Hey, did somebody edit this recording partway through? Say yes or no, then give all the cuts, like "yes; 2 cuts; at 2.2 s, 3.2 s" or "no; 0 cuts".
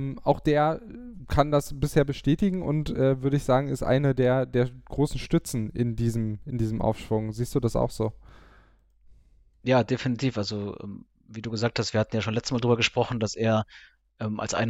no; 0 cuts